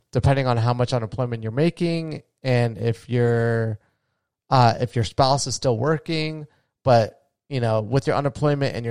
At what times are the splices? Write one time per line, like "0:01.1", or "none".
none